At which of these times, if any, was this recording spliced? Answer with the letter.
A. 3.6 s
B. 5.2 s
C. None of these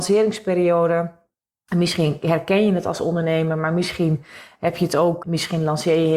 B